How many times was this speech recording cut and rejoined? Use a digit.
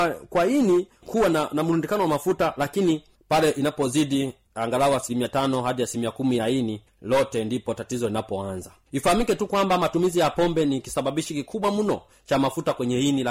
0